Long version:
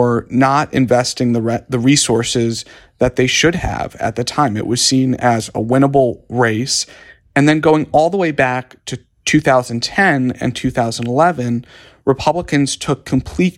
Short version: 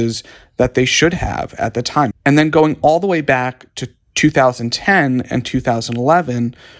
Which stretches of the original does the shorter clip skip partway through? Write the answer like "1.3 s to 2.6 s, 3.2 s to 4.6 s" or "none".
4.5 s to 7.2 s